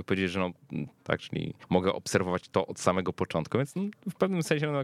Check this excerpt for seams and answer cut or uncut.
cut